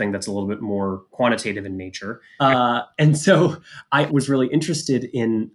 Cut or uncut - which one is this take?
cut